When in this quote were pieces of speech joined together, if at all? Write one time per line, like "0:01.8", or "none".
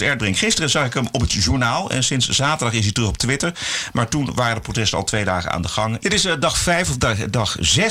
0:06.0